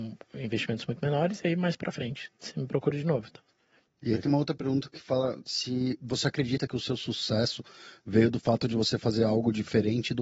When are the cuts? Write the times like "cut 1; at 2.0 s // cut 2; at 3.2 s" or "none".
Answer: cut 1; at 3.9 s